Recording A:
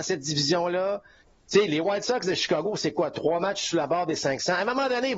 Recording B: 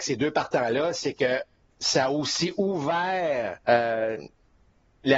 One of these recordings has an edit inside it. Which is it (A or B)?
B